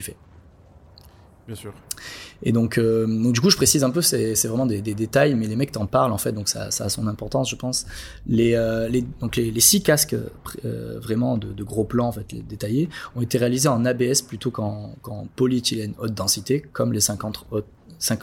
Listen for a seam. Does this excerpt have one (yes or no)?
no